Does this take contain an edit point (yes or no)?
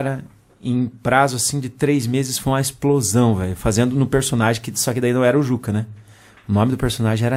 no